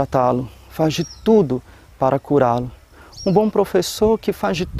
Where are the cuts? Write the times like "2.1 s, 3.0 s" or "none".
none